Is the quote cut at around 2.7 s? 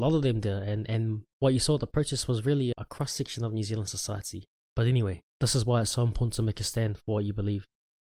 yes; 1 cut; at 2.7 s

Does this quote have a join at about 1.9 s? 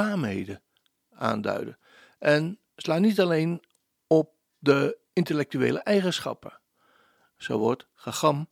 no; 0 cuts

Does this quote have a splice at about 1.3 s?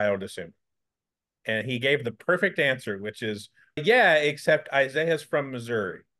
no; 1 cut; at 3.8 s

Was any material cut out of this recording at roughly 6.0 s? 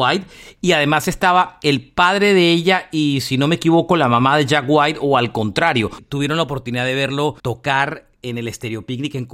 yes; 2 cuts; at 6.0 s, 7.4 s

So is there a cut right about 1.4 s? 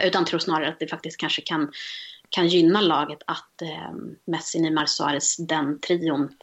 no; 1 cut; at 4.2 s

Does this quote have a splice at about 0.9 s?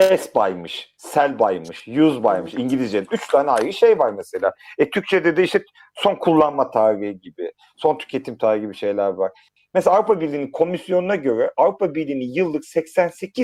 no; 0 cuts

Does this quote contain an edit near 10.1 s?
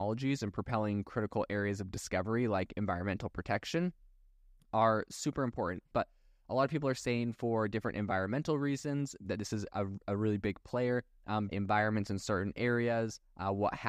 no; 2 cuts; at 5.9 s, 11.5 s

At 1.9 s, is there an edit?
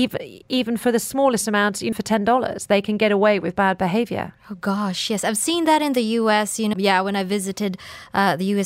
yes; 2 cuts; at 1.9 s, 6.7 s

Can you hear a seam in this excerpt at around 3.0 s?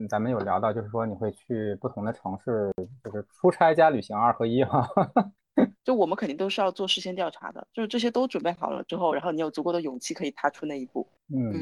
no; 1 cut; at 5.7 s

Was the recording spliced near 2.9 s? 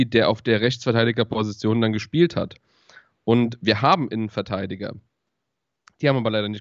no; 0 cuts

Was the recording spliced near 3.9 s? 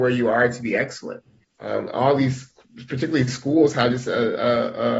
no; 1 cut; at 1.4 s

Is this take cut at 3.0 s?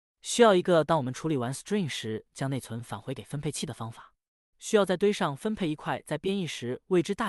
no; 1 cut; at 4.5 s

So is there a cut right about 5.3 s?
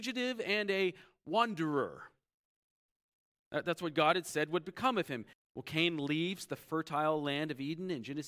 yes; 1 cut; at 5.3 s

